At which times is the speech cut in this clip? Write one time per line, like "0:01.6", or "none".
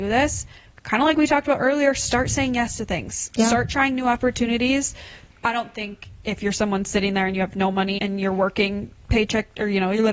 0:05.3
0:08.0